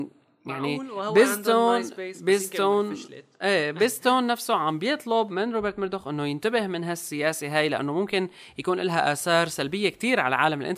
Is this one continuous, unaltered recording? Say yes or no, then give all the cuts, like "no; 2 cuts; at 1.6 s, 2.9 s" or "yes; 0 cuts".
yes; 0 cuts